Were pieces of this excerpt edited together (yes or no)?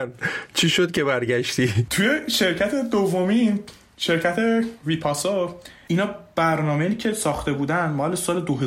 no